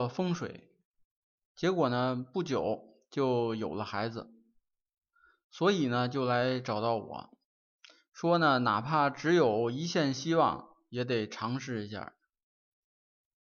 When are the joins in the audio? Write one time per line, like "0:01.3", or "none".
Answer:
none